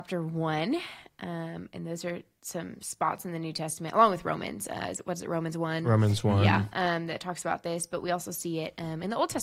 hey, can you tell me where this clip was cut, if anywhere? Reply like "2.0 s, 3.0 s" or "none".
none